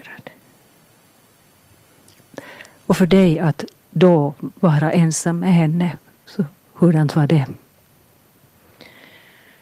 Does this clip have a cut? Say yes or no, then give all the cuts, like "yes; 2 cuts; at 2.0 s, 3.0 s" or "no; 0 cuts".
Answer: no; 0 cuts